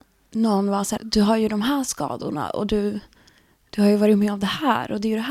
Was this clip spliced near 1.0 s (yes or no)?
yes